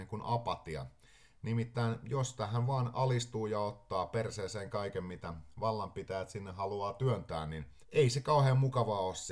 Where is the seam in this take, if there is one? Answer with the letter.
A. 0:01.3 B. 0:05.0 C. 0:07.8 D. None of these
C